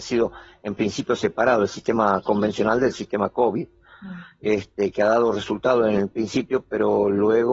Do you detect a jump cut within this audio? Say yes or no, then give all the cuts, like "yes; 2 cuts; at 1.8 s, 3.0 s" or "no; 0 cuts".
no; 0 cuts